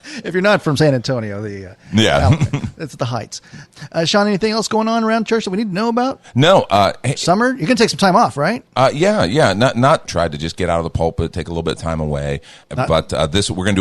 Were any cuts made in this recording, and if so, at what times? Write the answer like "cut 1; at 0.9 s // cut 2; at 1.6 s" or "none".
cut 1; at 10.1 s